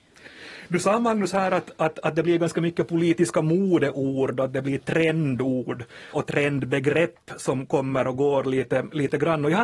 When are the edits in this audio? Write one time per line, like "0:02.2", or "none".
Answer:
0:06.1